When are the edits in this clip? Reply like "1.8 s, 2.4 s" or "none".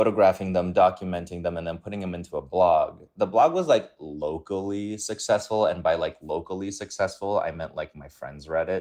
none